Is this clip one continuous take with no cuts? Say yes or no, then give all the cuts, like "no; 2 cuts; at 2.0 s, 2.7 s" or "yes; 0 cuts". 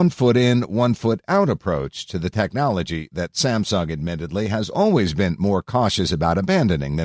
yes; 0 cuts